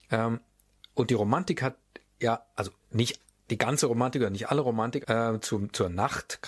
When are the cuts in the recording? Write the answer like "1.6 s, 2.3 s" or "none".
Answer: 2.8 s, 5.0 s